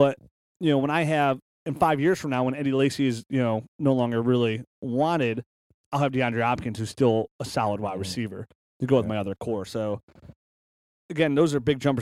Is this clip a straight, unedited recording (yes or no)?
yes